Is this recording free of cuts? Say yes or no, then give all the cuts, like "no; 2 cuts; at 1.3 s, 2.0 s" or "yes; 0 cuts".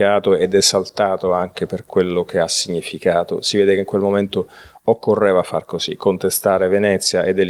yes; 0 cuts